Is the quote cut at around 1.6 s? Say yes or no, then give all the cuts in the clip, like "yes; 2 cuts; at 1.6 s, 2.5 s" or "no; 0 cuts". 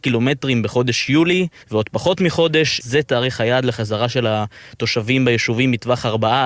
yes; 2 cuts; at 1.6 s, 2.8 s